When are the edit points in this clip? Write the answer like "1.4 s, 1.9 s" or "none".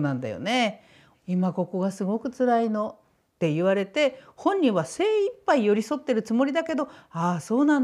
1.1 s